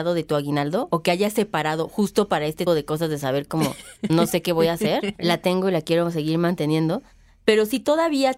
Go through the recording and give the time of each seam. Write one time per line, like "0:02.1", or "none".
0:02.7
0:05.2